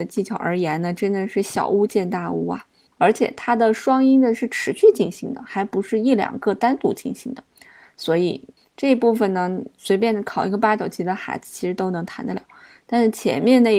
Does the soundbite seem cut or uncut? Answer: cut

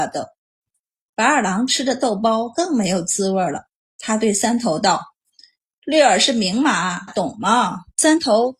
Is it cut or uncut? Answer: cut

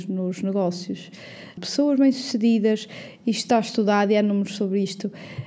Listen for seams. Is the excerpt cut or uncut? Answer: cut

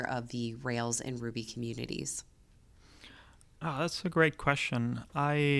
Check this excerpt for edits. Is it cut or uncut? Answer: uncut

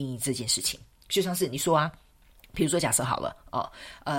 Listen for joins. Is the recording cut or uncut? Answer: uncut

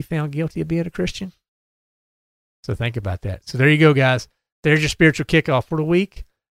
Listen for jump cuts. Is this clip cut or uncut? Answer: uncut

